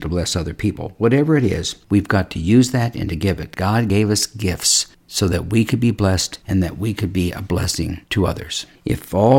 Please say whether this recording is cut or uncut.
uncut